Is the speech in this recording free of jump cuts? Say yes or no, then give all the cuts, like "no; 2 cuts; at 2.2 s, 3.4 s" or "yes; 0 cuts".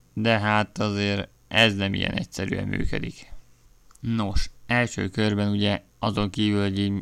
yes; 0 cuts